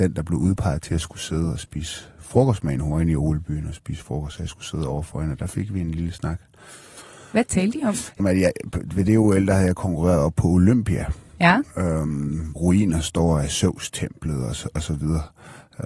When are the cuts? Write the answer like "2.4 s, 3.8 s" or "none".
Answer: 8.2 s, 12.6 s